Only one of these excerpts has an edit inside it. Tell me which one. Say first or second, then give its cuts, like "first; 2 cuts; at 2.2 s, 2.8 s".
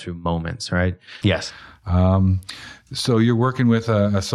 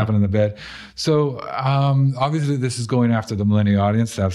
first; 1 cut; at 1.2 s